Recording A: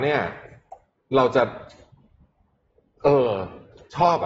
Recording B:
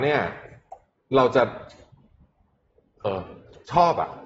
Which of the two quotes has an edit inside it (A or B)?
B